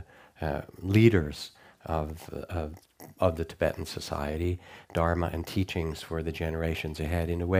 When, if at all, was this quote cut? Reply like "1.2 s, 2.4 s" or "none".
4.8 s